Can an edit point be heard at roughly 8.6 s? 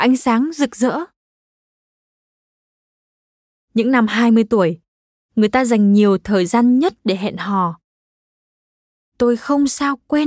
no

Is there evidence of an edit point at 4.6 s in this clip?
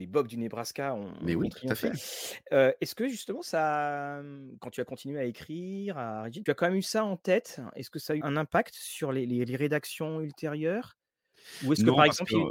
no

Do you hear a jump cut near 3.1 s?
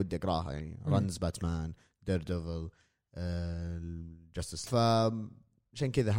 no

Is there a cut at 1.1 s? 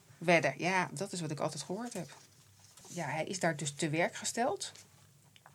no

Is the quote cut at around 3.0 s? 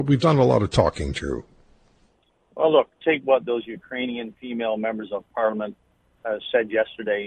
yes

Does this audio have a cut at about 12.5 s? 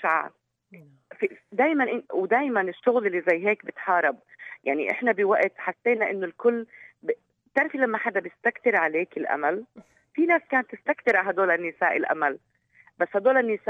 no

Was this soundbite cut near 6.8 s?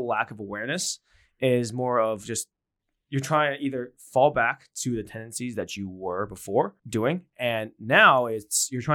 yes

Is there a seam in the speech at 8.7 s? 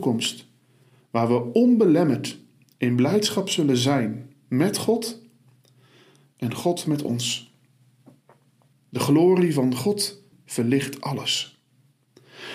yes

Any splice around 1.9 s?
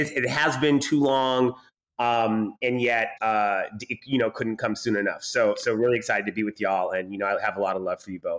no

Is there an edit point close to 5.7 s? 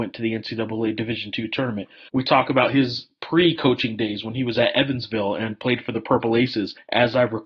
no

